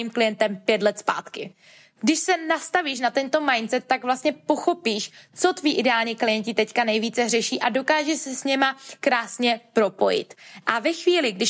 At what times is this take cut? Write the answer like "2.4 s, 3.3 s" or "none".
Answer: none